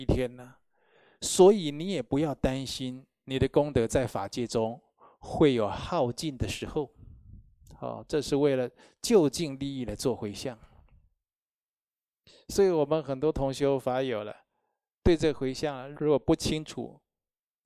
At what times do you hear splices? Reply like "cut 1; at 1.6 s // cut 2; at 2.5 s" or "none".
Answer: cut 1; at 15.9 s